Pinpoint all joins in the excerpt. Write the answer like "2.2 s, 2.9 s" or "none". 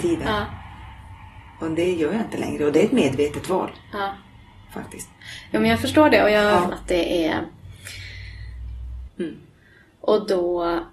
6.7 s, 9.1 s